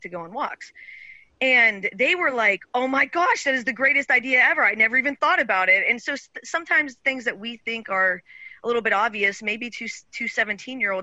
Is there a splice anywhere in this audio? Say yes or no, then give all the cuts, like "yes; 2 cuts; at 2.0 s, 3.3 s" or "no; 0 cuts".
no; 0 cuts